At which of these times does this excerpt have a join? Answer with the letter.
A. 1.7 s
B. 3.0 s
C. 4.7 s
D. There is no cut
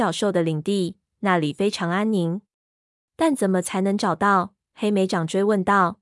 B